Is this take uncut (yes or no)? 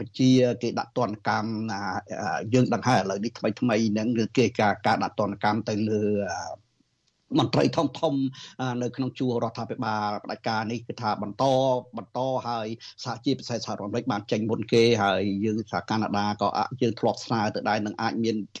yes